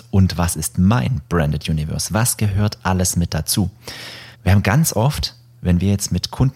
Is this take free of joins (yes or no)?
no